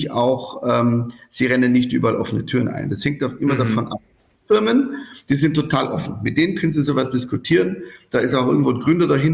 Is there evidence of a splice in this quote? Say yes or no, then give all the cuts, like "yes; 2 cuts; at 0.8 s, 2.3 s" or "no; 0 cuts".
no; 0 cuts